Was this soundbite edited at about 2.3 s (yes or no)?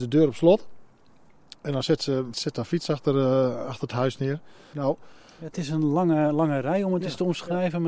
yes